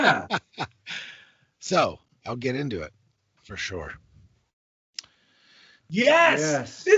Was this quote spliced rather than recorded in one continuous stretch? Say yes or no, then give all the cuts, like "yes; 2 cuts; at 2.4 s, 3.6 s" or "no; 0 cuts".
yes; 2 cuts; at 3.4 s, 5.8 s